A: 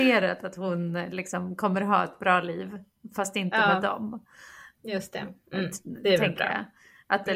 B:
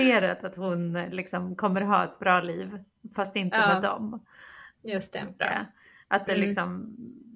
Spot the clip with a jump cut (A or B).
B